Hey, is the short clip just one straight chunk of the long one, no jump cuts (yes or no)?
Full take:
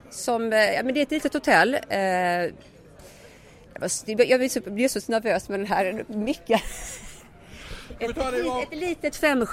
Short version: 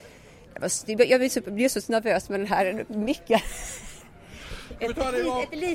yes